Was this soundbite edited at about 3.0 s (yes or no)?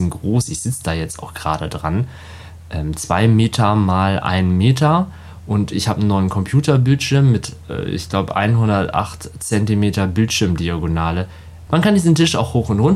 no